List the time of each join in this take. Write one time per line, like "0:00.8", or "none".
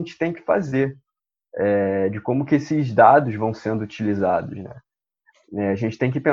none